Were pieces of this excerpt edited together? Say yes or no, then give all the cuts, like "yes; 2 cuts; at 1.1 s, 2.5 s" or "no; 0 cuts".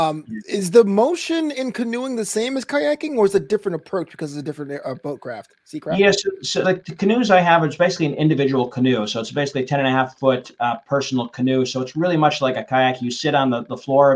yes; 1 cut; at 6.6 s